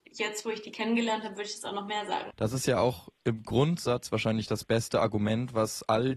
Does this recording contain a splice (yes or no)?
yes